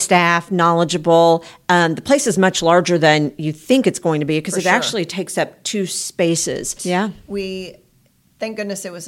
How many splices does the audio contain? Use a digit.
1